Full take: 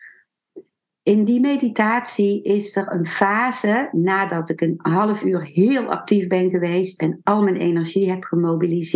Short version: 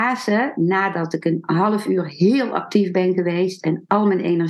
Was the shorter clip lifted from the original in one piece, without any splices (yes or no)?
yes